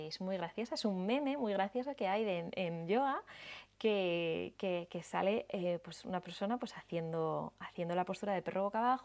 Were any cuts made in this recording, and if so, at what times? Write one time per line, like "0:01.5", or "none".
none